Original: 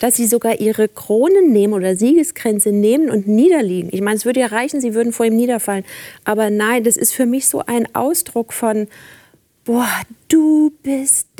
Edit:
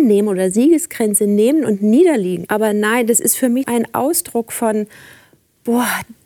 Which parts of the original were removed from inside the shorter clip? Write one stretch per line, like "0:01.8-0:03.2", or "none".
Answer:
0:03.9-0:06.2
0:07.4-0:07.6